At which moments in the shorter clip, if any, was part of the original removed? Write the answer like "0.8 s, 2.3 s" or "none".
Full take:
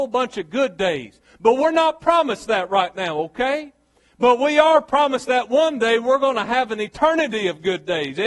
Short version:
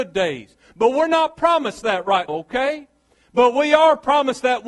2.3 s